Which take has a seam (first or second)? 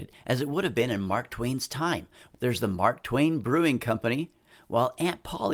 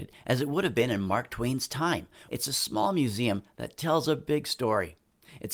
second